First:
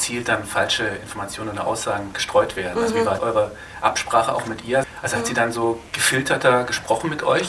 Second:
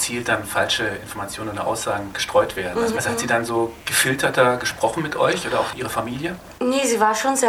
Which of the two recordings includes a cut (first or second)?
second